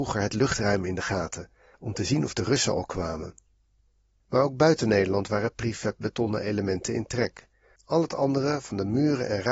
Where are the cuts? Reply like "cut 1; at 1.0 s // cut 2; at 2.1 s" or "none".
cut 1; at 1.7 s // cut 2; at 7.8 s